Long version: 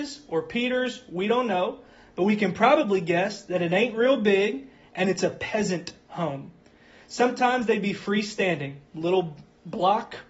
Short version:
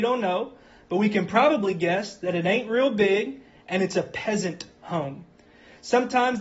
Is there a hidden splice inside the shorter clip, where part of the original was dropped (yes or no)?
no